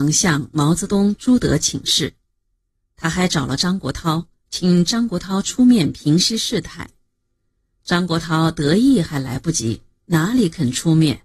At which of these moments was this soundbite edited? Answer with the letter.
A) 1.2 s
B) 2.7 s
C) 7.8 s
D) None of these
D